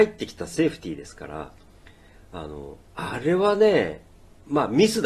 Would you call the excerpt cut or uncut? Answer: uncut